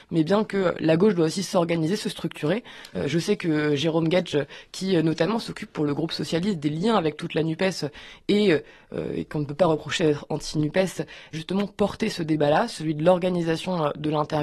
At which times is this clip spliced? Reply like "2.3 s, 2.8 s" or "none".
2.9 s, 11.3 s